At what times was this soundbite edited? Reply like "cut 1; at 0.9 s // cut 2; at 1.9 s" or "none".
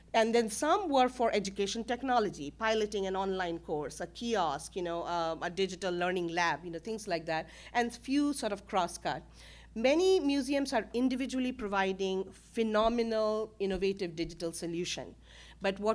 none